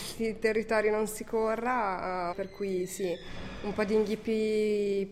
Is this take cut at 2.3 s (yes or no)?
yes